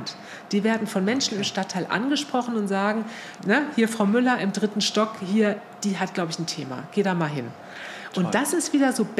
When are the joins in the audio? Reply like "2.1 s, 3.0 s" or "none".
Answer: 3.4 s